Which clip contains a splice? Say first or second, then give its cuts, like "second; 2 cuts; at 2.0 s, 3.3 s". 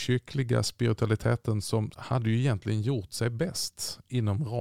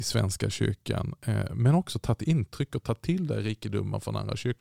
first; 1 cut; at 1.9 s